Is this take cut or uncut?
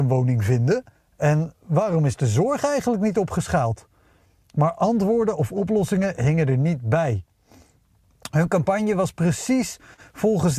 uncut